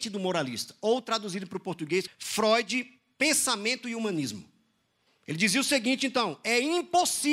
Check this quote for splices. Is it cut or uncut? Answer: cut